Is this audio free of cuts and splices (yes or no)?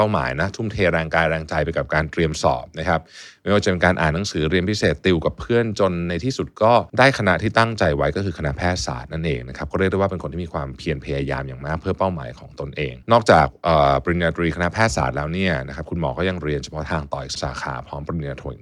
no